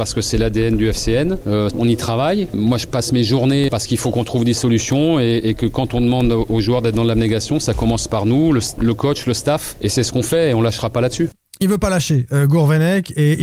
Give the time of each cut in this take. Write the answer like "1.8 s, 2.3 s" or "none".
1.7 s, 3.7 s